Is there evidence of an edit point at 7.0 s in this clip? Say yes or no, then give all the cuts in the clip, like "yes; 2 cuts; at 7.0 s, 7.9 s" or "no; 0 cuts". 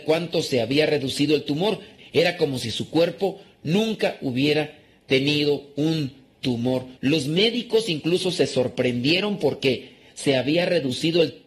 yes; 2 cuts; at 2.0 s, 7.0 s